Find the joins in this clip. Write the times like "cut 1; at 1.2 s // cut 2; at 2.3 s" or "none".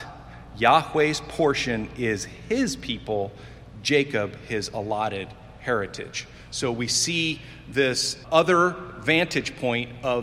cut 1; at 8.2 s